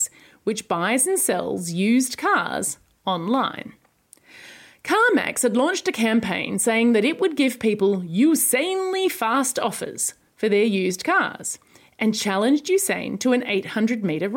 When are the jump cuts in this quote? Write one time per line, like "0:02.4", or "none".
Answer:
none